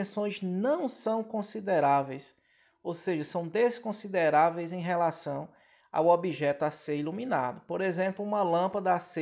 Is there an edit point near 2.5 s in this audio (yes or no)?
no